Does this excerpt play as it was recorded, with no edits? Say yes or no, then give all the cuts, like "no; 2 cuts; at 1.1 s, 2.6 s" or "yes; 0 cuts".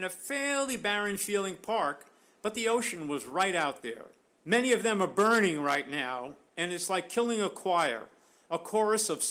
no; 1 cut; at 4.4 s